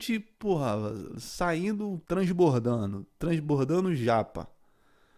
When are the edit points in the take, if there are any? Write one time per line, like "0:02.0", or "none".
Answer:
0:02.0

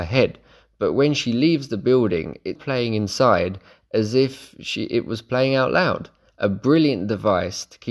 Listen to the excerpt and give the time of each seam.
0:02.6

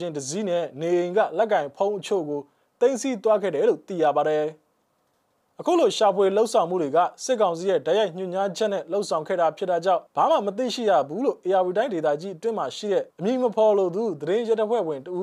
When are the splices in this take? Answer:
0:10.1
0:13.1

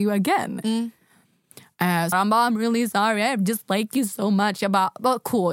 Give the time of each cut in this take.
0:02.1

